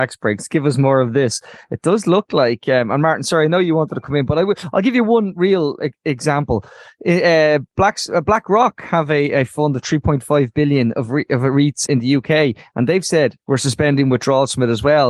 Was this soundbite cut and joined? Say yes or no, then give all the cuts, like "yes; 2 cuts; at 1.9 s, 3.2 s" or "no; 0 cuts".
yes; 2 cuts; at 11.9 s, 13.4 s